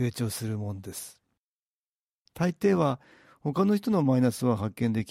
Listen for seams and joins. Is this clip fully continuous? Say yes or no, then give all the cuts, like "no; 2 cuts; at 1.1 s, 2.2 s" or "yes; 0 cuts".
yes; 0 cuts